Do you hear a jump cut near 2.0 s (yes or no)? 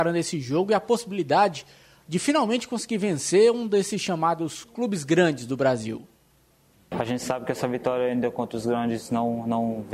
no